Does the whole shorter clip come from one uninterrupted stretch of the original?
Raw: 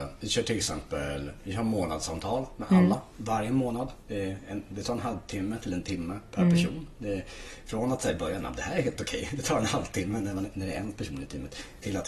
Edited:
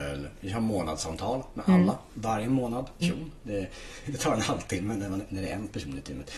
no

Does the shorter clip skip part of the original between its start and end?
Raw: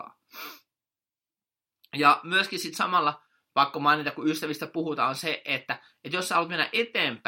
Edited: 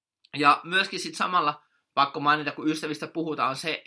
no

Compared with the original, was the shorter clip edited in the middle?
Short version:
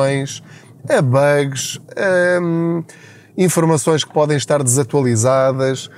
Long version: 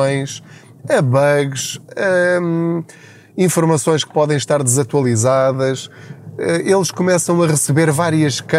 no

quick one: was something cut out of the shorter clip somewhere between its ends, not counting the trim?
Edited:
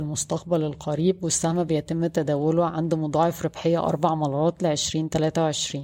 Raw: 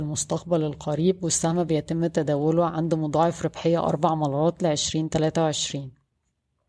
no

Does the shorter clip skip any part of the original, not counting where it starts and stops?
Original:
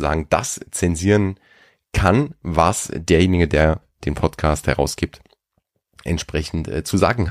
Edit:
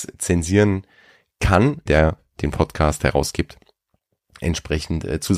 yes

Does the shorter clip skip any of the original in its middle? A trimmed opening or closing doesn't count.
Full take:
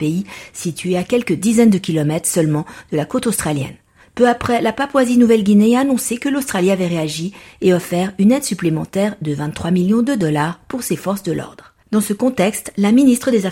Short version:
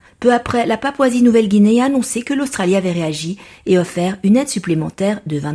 no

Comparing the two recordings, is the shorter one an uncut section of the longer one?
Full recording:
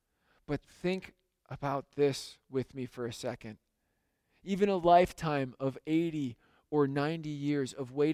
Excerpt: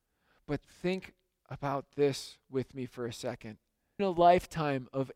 no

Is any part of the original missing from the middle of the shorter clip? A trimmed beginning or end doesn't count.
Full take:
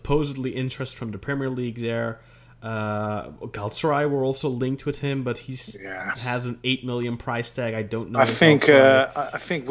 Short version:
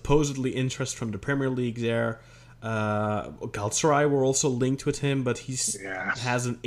no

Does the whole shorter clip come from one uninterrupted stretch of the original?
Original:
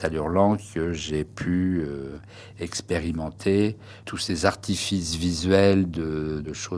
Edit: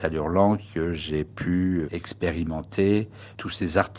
no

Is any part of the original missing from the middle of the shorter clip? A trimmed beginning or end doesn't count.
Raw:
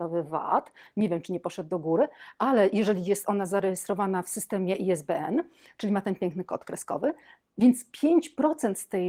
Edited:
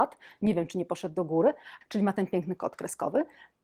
yes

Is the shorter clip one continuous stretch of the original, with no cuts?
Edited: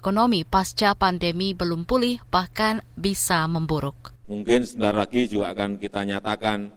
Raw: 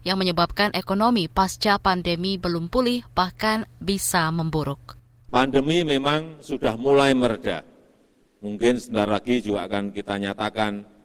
no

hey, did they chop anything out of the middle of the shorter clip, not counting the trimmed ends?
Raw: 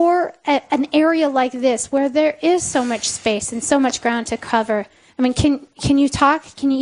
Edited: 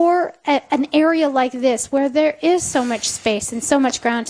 no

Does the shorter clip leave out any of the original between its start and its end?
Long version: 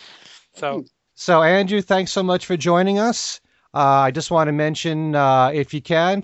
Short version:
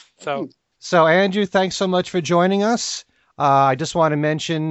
no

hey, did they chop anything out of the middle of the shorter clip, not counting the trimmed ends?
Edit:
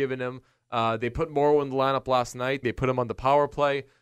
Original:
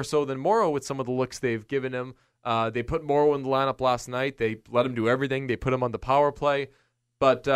yes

